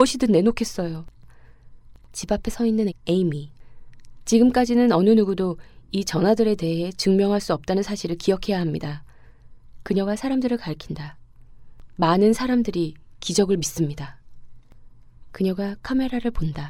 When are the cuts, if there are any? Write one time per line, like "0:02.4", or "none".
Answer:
0:02.9
0:09.8